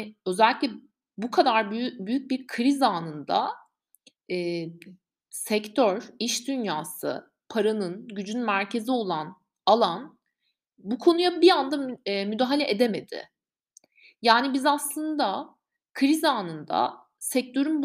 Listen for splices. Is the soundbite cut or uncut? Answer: uncut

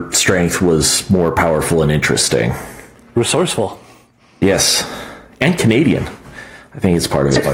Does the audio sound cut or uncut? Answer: uncut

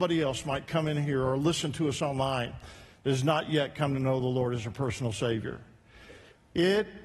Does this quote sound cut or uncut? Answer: uncut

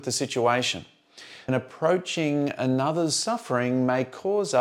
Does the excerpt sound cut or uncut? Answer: cut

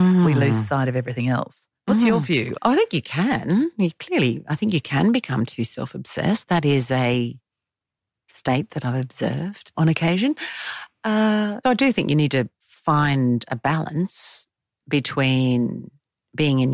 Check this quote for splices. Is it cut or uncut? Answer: cut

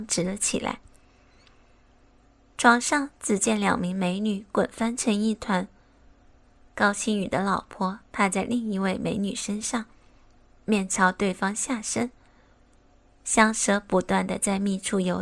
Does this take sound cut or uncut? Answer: uncut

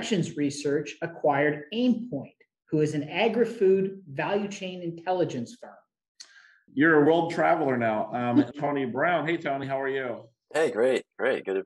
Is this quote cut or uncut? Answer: cut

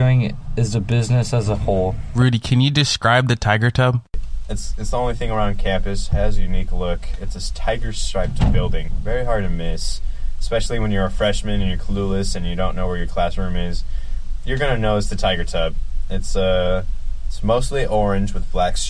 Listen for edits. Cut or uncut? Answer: uncut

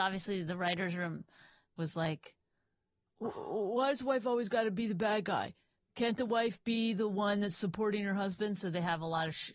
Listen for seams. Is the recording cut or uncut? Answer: uncut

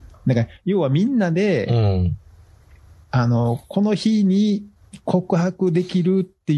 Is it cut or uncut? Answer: uncut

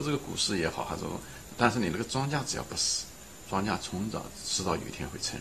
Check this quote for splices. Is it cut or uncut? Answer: cut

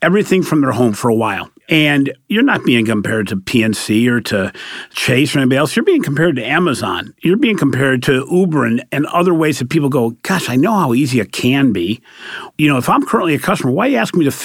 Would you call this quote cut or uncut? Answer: uncut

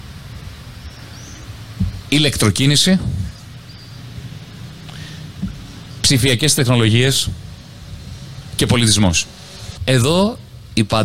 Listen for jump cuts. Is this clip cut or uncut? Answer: uncut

